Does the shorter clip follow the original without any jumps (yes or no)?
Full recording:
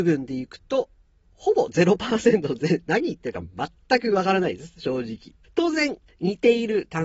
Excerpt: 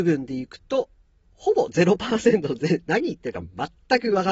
yes